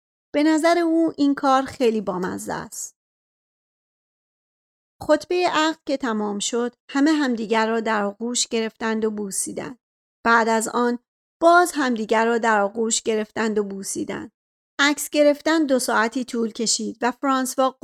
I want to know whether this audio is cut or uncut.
cut